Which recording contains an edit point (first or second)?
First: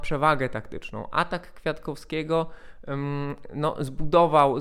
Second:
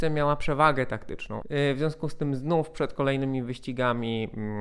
second